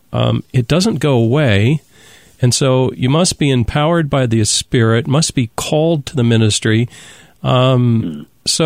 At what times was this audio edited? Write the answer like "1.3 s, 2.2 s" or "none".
none